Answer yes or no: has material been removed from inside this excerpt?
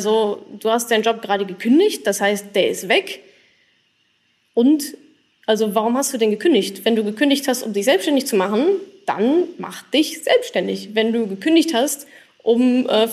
no